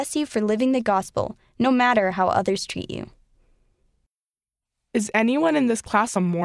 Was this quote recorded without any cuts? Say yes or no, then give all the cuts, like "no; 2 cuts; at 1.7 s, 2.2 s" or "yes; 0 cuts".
yes; 0 cuts